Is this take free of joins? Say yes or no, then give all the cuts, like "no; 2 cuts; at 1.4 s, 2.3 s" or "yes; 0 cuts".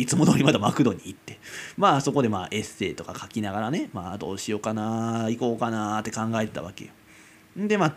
yes; 0 cuts